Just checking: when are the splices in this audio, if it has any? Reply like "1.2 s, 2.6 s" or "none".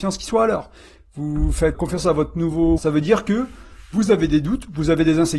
1.7 s, 2.8 s